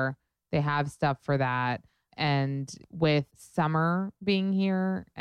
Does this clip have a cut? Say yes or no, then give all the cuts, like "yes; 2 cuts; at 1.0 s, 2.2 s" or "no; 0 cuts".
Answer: yes; 1 cut; at 3.3 s